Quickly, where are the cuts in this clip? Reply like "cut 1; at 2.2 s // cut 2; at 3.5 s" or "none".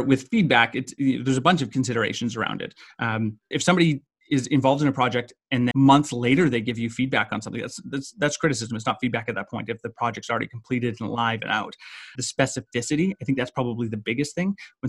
cut 1; at 3.5 s // cut 2; at 5.7 s // cut 3; at 12.2 s